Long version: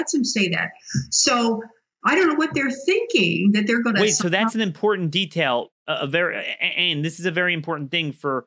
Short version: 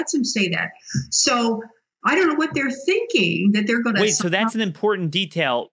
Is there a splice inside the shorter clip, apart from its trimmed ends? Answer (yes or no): no